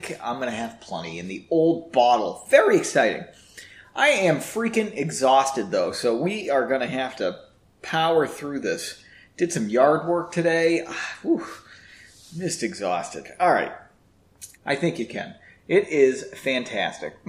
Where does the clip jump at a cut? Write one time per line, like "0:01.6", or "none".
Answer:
0:14.5